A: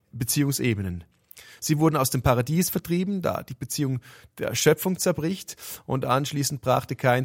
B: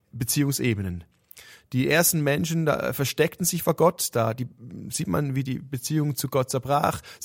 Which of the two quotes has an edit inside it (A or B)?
A